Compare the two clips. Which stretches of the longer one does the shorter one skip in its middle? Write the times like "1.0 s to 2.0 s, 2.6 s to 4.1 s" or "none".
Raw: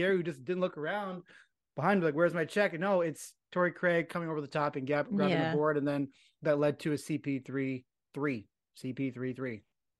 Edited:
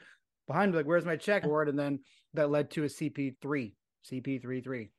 2.7 s to 5.5 s, 7.4 s to 8.1 s